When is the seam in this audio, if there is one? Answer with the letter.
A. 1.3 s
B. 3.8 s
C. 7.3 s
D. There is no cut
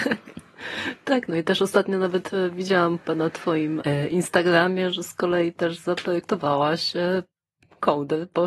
B